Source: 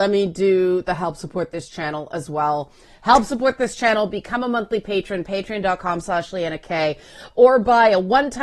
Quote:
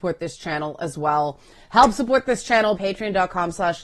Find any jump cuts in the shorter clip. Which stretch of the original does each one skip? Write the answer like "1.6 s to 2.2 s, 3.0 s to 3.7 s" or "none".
4.1 s to 5.2 s